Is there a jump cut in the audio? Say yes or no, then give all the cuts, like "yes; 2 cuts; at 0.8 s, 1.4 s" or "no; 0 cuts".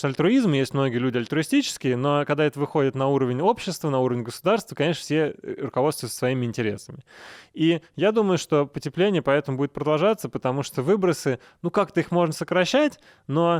no; 0 cuts